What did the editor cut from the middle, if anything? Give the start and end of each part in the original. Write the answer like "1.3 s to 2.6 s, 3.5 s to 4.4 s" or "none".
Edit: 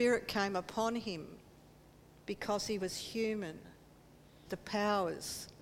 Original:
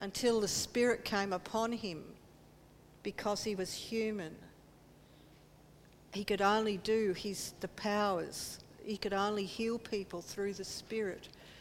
5.2 s to 7.6 s